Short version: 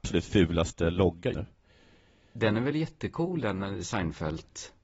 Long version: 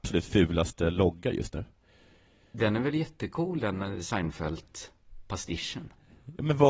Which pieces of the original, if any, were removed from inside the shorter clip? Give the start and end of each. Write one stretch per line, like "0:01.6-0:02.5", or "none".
0:01.3-0:01.5